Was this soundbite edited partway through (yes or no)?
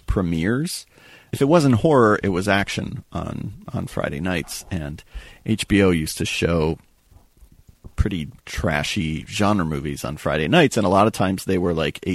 yes